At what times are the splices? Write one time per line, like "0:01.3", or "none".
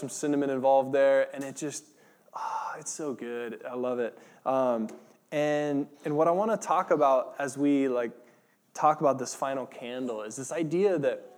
none